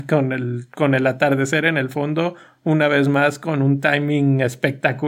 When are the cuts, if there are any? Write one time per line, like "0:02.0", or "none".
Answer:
none